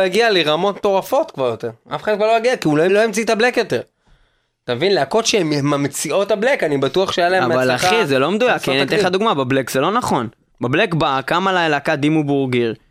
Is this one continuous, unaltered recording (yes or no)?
no